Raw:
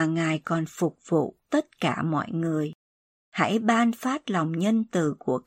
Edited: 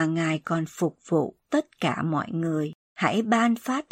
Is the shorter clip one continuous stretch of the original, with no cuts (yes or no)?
no